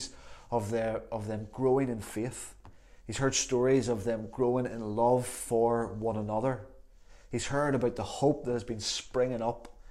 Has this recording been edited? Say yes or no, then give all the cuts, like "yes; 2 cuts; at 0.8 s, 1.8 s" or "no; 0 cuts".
no; 0 cuts